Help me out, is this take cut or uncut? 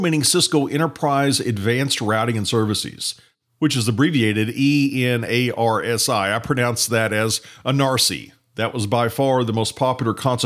uncut